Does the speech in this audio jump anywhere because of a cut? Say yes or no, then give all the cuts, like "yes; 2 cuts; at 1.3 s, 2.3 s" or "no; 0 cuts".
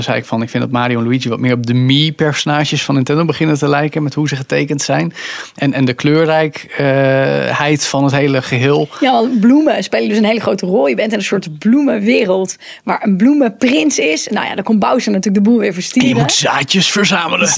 no; 0 cuts